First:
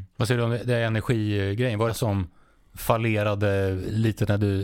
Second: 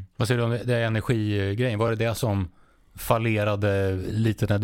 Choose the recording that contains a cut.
first; 1 cut; at 1.9 s

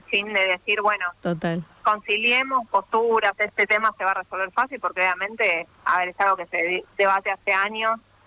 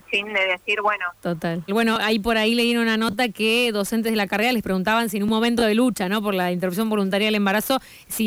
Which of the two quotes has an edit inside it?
second; 1 cut; at 1.7 s

